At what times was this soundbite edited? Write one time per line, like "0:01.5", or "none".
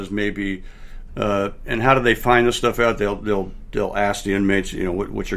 0:01.1